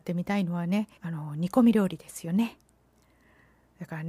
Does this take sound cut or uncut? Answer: cut